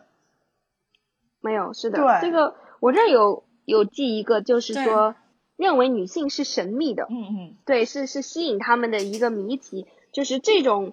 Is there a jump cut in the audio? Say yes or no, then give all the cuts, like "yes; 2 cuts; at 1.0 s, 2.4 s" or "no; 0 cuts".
no; 0 cuts